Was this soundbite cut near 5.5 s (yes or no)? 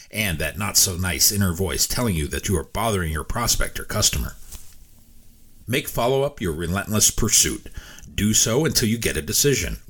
no